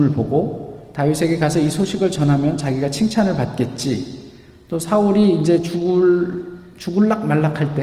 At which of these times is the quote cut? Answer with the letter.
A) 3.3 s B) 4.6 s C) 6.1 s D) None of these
D